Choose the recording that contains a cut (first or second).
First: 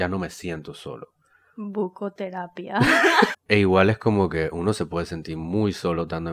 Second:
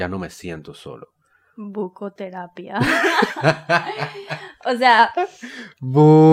first